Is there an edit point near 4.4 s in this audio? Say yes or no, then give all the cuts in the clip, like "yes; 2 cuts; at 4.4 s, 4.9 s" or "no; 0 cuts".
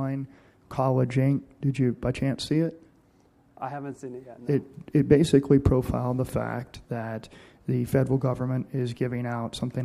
no; 0 cuts